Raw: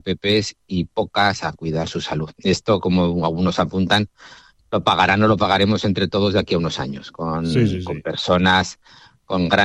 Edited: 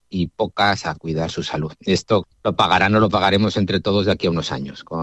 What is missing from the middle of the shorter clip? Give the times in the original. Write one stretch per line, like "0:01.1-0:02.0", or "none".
0:02.8-0:04.5